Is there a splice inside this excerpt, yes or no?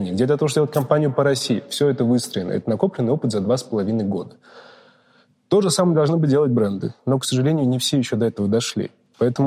no